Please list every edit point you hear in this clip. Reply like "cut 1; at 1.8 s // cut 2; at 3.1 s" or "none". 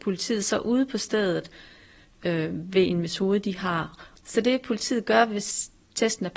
cut 1; at 4.2 s